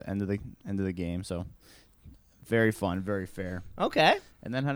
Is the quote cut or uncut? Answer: uncut